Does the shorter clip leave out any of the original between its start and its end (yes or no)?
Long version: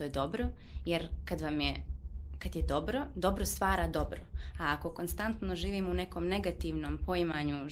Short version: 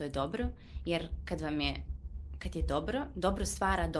no